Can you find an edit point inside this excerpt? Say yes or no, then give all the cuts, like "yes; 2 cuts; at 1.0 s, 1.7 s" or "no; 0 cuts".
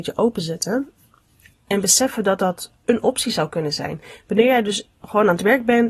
no; 0 cuts